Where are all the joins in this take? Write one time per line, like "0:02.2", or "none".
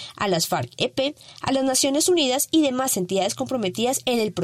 none